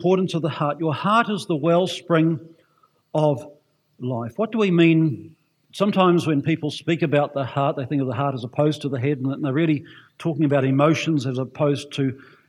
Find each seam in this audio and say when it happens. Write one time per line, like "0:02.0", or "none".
0:05.7